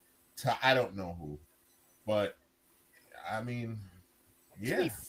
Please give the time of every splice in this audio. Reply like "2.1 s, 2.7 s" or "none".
none